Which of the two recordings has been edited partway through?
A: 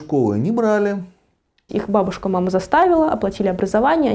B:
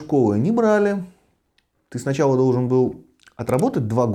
A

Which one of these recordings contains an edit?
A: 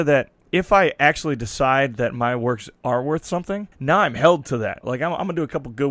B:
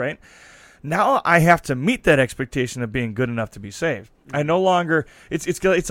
A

